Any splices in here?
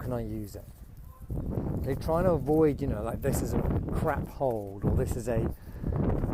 no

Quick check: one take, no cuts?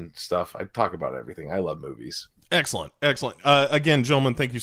yes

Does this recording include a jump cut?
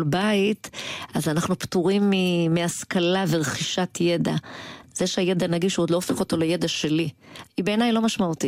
yes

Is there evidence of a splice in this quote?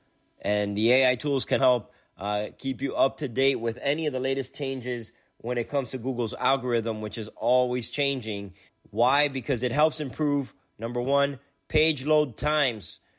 yes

